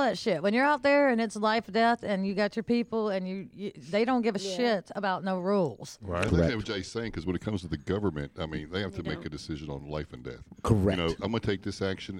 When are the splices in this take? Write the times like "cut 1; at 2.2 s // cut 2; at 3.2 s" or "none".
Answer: none